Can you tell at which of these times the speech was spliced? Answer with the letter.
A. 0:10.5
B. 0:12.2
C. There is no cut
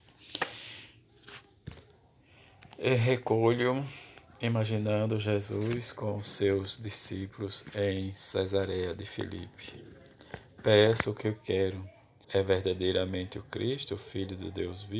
B